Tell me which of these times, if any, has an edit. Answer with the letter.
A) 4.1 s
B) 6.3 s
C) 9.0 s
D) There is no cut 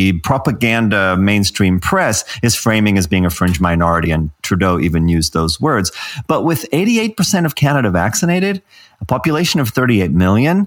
D